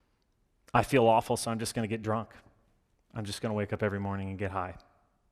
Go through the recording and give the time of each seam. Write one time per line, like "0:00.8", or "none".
none